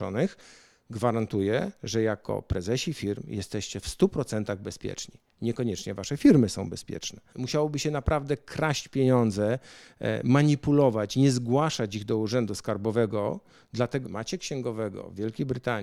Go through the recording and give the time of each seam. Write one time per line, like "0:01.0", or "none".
0:07.3
0:14.1